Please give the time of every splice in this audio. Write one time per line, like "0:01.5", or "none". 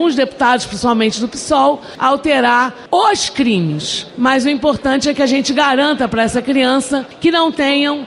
none